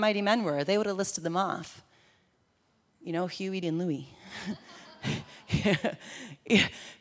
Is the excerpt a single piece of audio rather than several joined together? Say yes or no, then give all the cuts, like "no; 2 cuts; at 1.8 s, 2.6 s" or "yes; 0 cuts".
no; 1 cut; at 3.6 s